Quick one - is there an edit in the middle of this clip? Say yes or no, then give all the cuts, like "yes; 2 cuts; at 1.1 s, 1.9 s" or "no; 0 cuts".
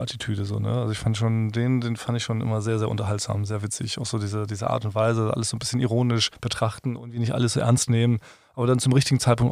no; 0 cuts